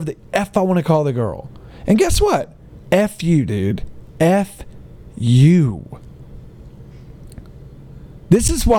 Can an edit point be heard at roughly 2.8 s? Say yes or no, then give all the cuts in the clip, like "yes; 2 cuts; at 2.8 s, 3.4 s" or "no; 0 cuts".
yes; 1 cut; at 2.8 s